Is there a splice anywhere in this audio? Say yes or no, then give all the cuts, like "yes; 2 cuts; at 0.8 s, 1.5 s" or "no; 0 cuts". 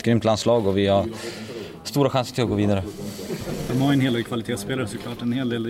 no; 0 cuts